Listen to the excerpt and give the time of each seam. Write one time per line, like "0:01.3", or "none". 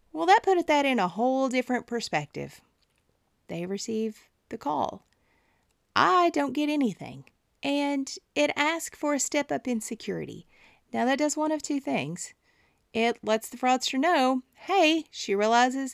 0:03.3
0:07.5
0:10.9